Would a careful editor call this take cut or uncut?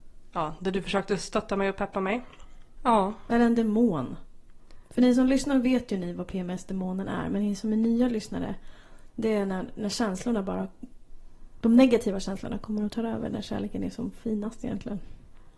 cut